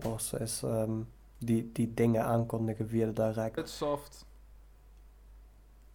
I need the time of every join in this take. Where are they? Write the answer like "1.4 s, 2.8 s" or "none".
3.6 s